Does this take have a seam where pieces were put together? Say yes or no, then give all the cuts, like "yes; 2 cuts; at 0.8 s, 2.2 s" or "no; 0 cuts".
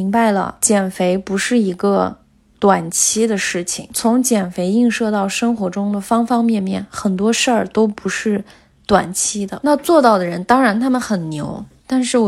yes; 1 cut; at 9.6 s